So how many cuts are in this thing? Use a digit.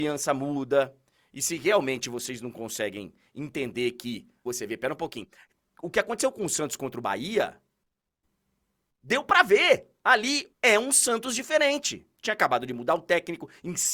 2